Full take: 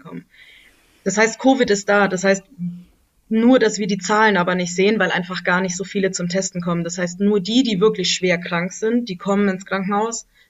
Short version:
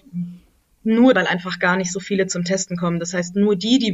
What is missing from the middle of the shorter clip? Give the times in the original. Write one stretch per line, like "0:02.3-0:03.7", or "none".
0:03.6-0:05.0

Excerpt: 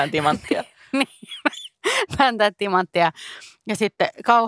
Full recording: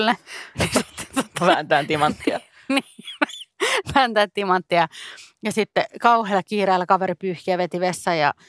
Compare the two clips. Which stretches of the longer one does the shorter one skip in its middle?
none

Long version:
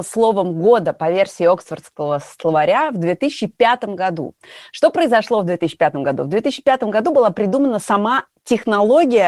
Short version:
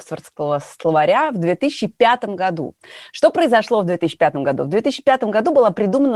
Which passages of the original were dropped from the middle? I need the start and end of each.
none

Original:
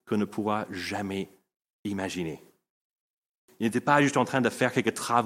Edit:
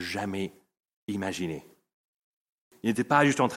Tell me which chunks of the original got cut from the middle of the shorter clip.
none

